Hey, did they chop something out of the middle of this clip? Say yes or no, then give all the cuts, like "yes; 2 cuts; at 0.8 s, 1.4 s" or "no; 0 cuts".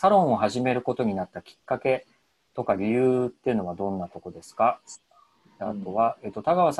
no; 0 cuts